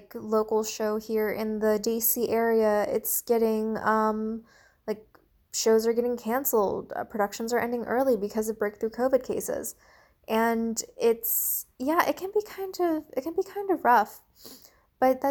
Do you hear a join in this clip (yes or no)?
no